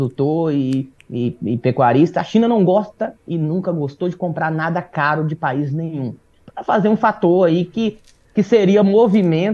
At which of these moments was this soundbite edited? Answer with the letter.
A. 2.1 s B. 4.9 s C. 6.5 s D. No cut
C